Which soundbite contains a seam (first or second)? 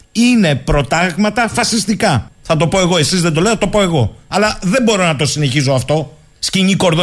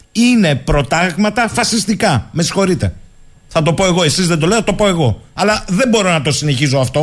first